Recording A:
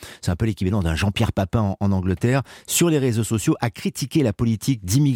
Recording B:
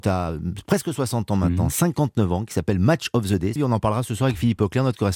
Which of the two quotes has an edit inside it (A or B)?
B